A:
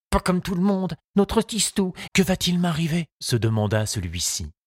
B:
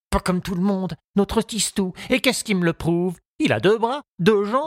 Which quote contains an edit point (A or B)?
A